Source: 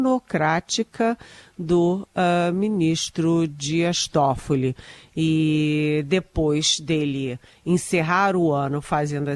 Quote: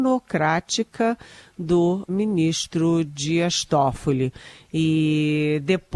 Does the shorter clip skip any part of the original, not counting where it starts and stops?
yes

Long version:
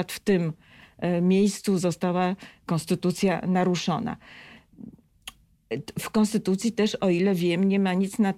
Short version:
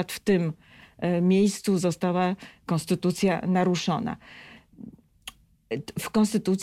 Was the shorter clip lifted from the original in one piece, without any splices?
yes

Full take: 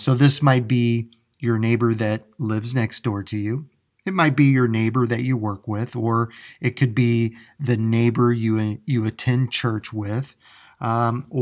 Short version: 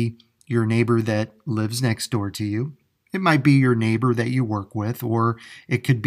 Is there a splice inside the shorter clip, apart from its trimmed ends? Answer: no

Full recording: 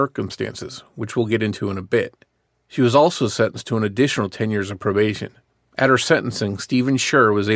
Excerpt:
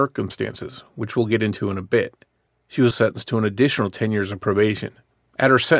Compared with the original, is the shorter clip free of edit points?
no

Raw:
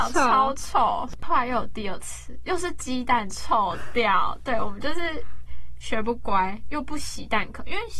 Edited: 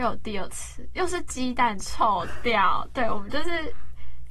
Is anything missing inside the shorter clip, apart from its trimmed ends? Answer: no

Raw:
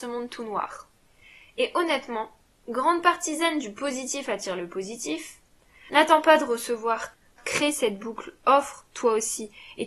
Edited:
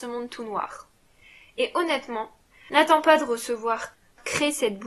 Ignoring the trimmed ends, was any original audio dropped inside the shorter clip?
yes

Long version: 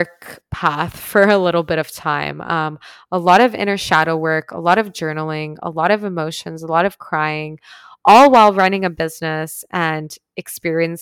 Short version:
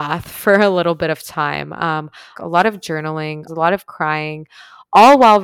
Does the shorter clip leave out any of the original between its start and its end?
yes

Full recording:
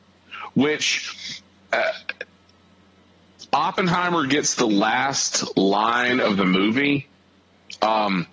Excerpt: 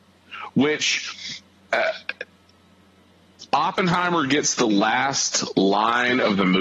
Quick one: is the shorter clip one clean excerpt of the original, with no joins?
yes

